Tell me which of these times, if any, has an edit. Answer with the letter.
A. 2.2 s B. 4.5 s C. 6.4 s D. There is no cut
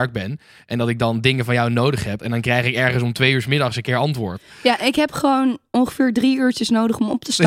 A